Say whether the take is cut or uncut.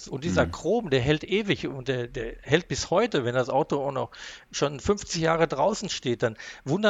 uncut